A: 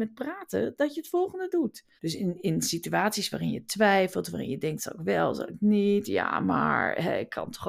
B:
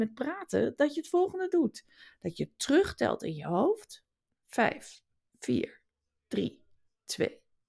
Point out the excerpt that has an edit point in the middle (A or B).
A